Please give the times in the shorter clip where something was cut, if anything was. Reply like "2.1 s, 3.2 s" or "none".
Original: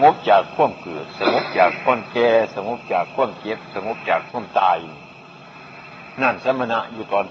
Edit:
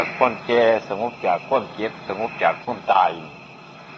none